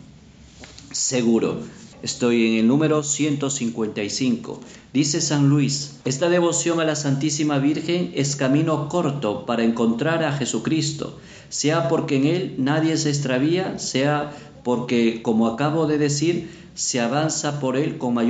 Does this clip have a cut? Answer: yes; 2 cuts; at 1.9 s, 6.0 s

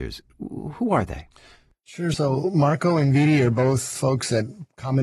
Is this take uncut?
yes; 0 cuts

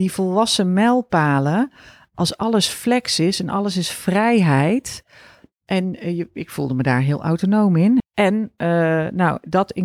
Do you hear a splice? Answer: yes; 1 cut; at 8.0 s

